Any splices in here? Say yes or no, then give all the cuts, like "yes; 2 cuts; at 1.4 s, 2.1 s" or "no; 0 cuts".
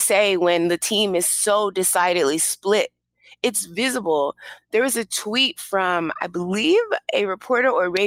no; 0 cuts